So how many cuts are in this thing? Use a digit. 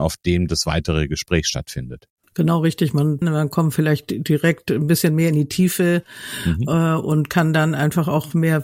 1